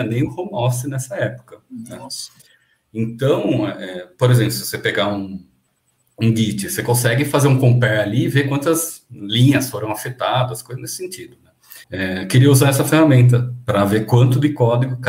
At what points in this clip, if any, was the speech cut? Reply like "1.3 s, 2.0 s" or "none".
11.8 s